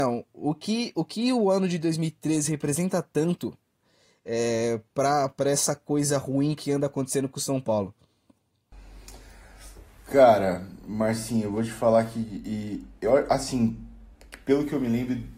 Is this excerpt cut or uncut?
uncut